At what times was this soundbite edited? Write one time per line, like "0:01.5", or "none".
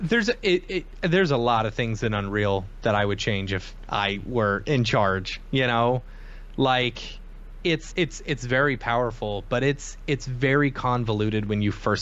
0:07.9